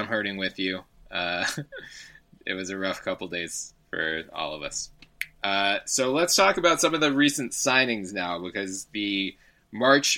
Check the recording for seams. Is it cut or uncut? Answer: uncut